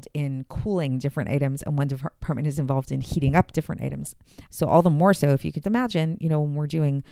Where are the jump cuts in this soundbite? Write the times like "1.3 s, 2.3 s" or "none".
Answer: 4.5 s, 5.6 s

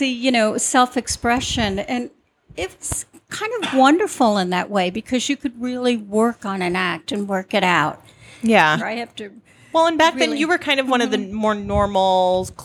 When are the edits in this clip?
8.8 s

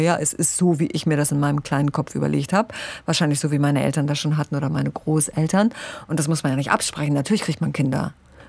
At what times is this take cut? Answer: none

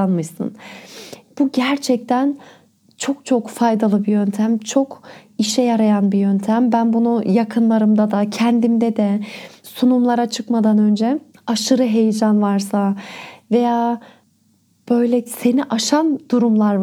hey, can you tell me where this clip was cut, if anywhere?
1.2 s

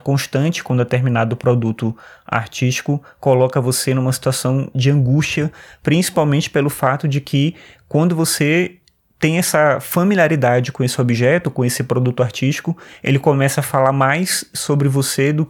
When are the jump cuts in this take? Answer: none

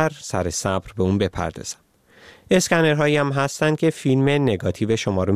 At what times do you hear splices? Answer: none

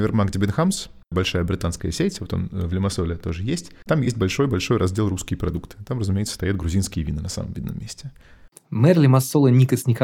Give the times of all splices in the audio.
none

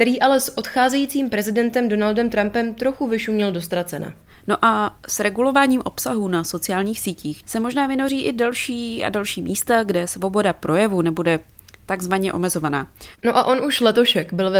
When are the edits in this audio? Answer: 7.4 s, 13.2 s

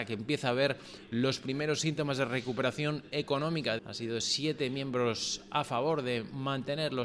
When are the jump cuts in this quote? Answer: 3.8 s

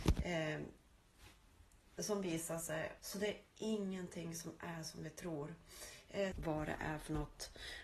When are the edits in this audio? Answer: 3.0 s, 6.3 s

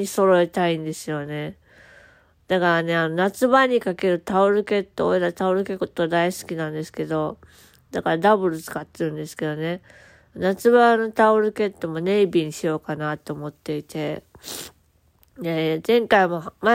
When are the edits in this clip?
none

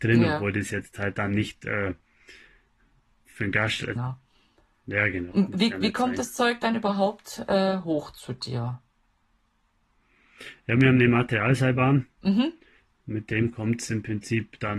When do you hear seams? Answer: 4.0 s, 5.3 s

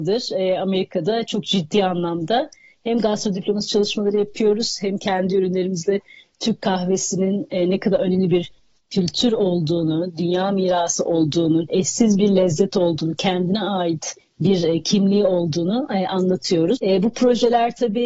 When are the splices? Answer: 11.7 s, 16.8 s

